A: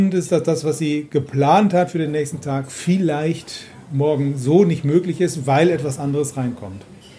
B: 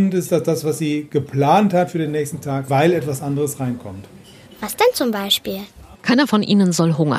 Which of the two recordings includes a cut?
B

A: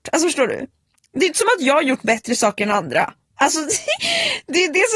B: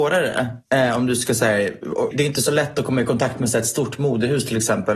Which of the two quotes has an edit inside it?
B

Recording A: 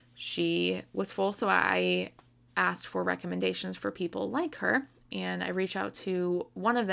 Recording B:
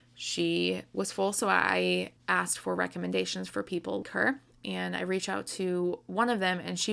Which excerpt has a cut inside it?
B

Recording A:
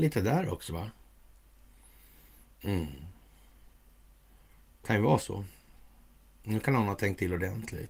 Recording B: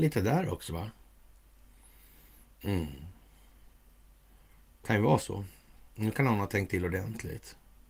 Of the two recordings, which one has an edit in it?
B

